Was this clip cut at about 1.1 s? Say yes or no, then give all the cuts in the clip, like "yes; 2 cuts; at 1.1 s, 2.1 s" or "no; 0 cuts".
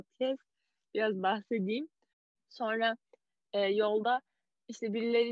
no; 1 cut; at 2.4 s